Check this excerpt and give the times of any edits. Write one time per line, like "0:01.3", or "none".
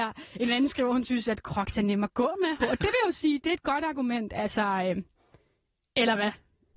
0:02.6